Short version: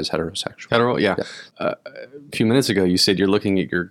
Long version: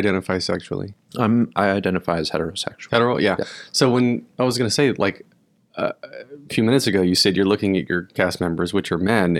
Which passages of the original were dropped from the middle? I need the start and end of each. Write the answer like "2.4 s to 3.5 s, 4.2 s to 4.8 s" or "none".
3.7 s to 5.7 s